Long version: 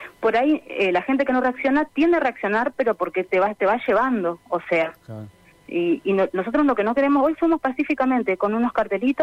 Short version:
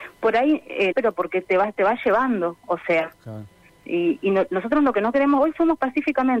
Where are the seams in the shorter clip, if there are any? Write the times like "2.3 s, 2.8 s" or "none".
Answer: 0.9 s